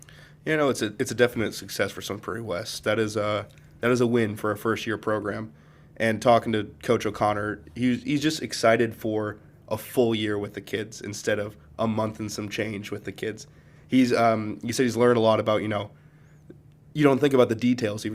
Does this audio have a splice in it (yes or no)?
yes